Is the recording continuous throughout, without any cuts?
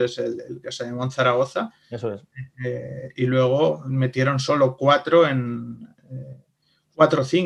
yes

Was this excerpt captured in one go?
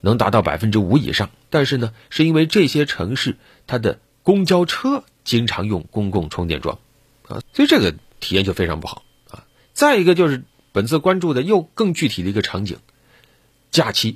no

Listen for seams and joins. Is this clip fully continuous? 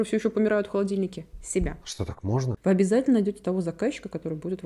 no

